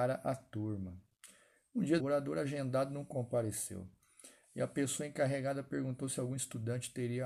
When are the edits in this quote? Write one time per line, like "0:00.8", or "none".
0:02.0